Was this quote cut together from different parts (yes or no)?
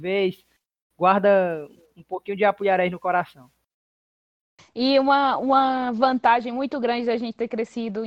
no